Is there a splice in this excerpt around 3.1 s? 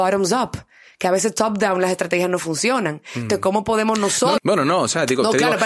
no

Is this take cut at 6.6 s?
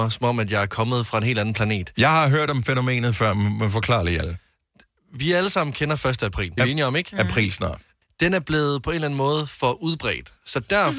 yes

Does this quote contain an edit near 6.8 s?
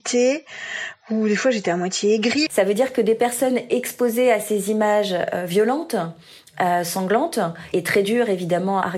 no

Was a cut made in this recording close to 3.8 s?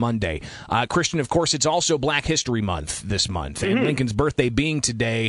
no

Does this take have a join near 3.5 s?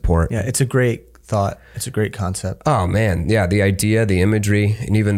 no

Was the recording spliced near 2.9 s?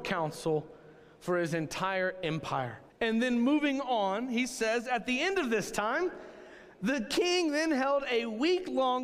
yes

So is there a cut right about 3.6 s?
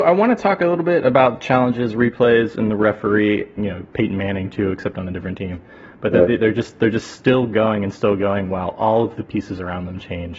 yes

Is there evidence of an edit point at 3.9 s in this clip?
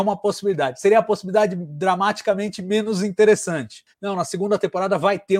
yes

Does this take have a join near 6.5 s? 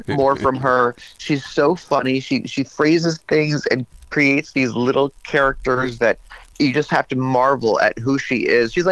yes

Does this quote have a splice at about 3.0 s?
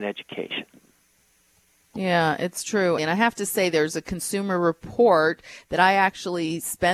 yes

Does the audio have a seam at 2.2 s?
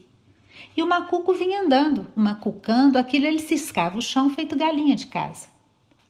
yes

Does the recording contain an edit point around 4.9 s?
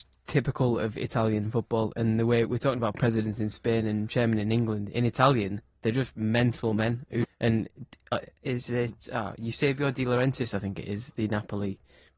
no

